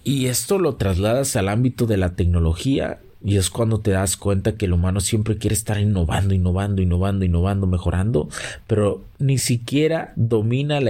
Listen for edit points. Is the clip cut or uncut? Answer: uncut